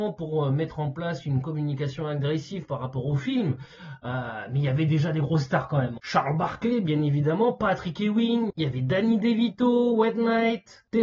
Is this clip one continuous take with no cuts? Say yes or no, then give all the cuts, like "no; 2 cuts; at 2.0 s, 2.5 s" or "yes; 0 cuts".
no; 2 cuts; at 6.0 s, 8.5 s